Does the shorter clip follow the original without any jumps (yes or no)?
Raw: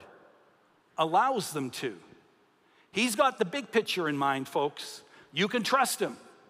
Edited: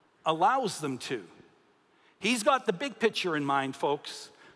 yes